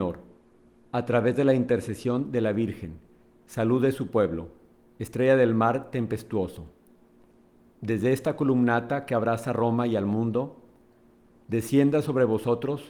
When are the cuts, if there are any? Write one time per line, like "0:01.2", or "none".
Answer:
none